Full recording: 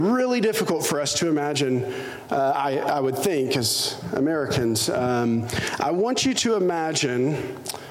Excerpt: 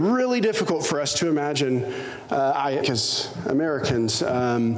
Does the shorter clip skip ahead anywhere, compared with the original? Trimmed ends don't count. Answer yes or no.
yes